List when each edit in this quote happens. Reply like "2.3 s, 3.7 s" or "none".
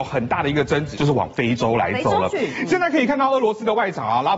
0.9 s